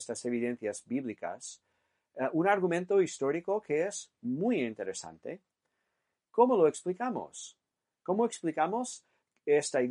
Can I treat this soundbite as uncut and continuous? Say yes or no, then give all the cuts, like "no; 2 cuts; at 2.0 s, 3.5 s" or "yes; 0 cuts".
no; 1 cut; at 6.2 s